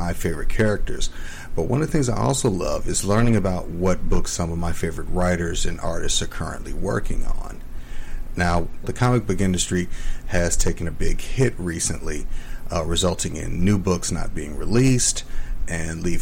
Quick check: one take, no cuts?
no; 2 cuts; at 8.8 s, 10.9 s

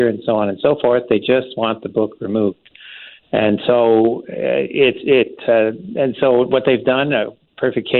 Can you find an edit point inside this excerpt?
no; 0 cuts

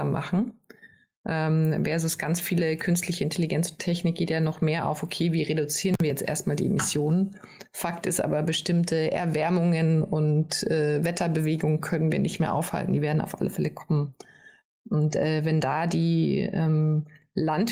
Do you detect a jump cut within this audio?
no; 0 cuts

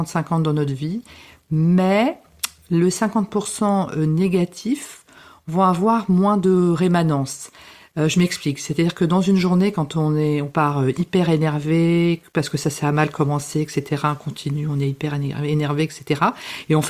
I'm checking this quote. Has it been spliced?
no; 0 cuts

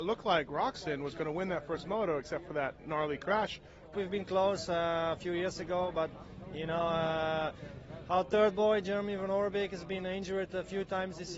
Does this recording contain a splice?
yes; 1 cut; at 3.9 s

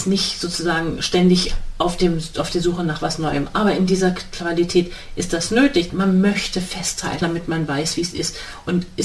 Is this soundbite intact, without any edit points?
no; 2 cuts; at 5.9 s, 7.2 s

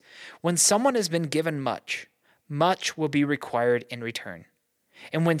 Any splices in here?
no; 0 cuts

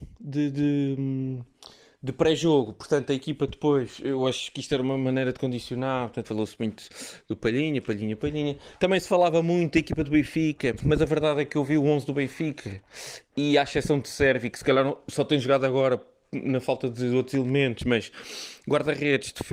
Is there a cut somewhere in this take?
yes; 2 cuts; at 6.2 s, 10.8 s

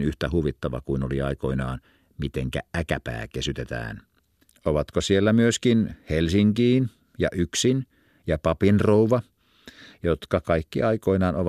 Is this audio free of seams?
no; 1 cut; at 4.5 s

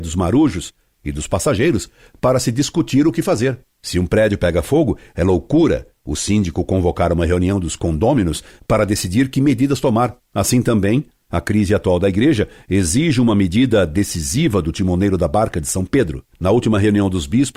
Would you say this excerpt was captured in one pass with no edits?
no; 2 cuts; at 3.8 s, 16.3 s

